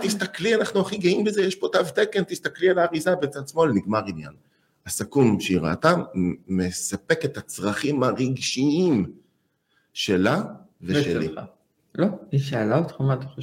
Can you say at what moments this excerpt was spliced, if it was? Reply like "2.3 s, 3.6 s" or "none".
11.8 s

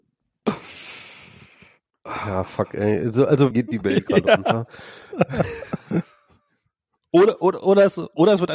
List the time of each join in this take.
3.5 s

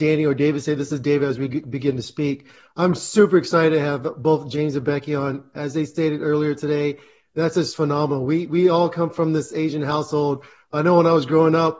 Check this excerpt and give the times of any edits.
none

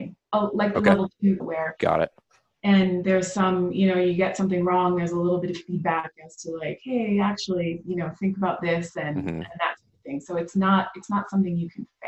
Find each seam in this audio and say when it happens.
1.4 s

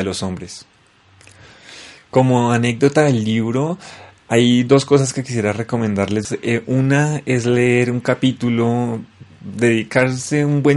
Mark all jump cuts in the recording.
none

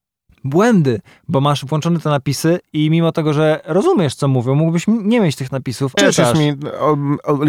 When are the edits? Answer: 6.0 s

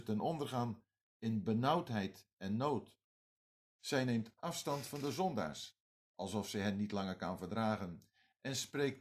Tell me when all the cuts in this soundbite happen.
3.8 s

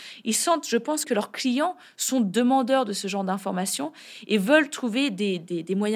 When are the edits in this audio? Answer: 1.0 s

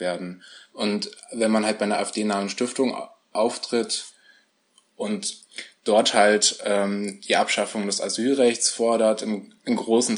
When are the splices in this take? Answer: none

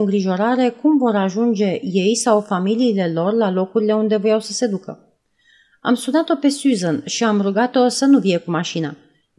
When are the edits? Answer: none

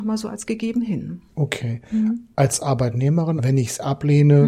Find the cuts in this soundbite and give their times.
2.3 s, 3.4 s

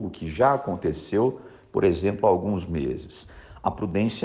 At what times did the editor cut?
none

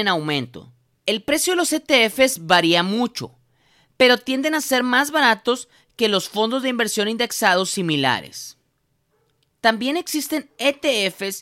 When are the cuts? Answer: 1.0 s, 9.5 s

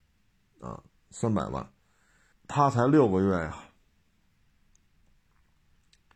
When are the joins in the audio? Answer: 2.3 s

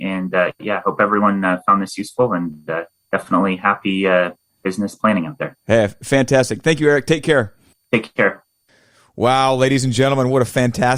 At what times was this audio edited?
none

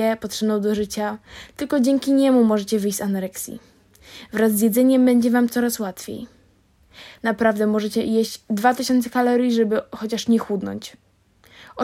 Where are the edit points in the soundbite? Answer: 7.2 s

